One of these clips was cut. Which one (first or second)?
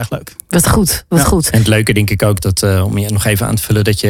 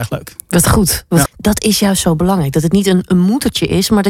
second